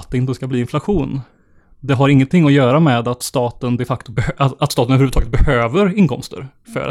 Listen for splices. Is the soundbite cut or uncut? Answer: uncut